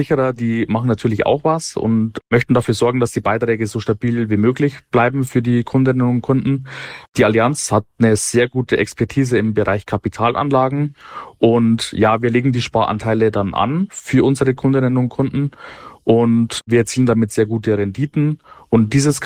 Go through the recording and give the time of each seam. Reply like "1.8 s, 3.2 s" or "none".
none

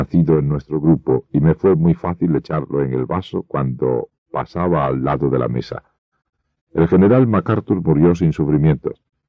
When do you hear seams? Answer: none

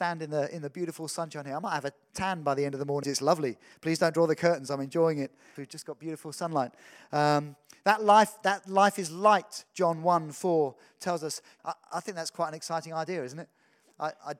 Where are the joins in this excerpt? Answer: 3.0 s, 5.6 s, 11.6 s

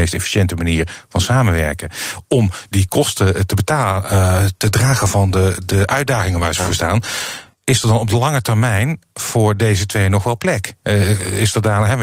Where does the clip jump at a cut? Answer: 7.5 s

